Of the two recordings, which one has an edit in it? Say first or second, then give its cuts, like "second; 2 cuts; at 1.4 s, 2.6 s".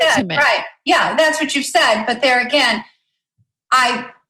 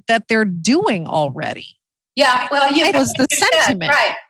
second; 1 cut; at 2.9 s